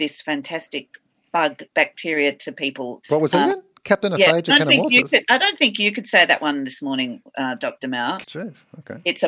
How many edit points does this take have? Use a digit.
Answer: 2